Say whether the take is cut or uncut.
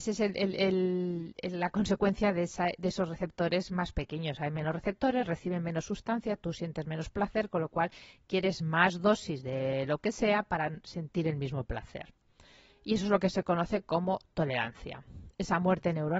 uncut